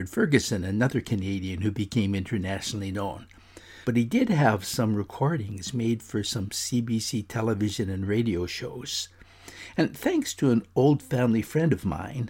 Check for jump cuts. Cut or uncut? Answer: cut